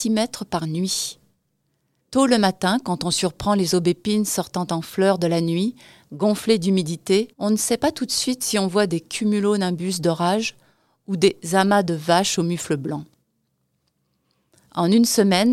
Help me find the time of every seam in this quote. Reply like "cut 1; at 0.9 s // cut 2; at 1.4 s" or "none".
cut 1; at 2.0 s // cut 2; at 7.3 s